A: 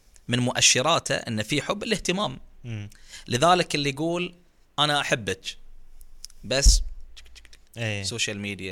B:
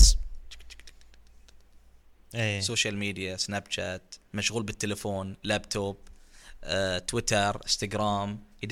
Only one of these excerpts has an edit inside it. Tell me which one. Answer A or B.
A